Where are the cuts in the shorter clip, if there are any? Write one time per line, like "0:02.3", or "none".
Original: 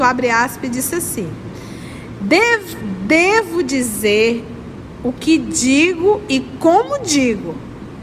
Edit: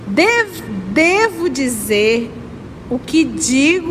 none